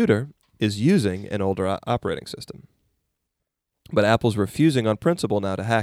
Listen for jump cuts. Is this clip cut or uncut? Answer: uncut